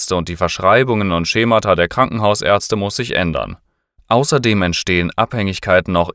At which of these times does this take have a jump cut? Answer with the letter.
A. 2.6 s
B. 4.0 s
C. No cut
B